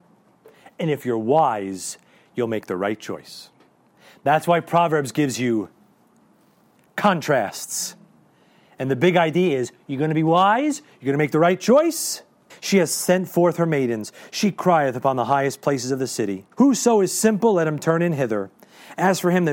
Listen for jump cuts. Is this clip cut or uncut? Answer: cut